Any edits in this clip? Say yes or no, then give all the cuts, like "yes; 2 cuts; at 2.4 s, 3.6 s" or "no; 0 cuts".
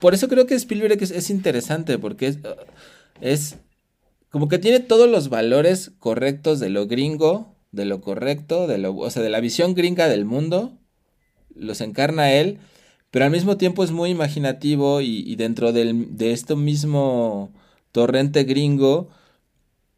no; 0 cuts